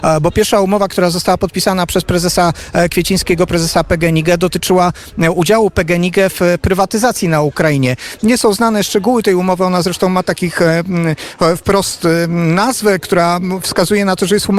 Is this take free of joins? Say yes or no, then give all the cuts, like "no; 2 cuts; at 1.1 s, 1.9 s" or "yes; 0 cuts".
yes; 0 cuts